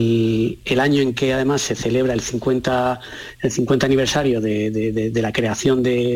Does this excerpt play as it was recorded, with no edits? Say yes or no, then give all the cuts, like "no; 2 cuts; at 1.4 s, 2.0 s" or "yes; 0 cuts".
yes; 0 cuts